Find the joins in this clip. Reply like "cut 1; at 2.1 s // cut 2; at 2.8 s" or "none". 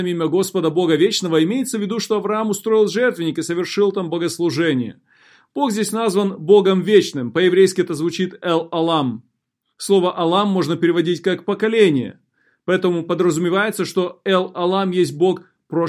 none